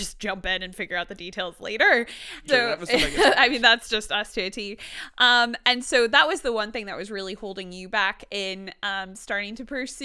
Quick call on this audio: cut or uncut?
cut